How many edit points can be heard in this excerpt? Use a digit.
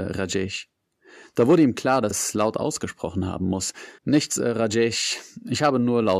2